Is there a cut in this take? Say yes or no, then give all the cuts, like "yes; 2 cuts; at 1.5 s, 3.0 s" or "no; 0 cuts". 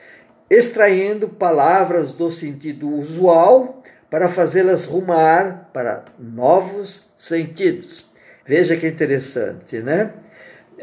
yes; 1 cut; at 8.4 s